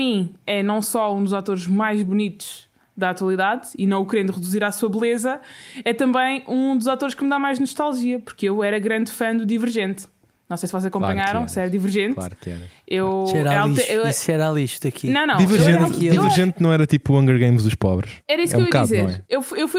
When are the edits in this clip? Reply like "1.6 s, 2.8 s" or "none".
none